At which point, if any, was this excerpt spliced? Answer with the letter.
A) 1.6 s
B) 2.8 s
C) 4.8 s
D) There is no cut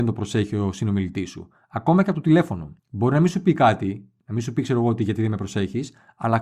B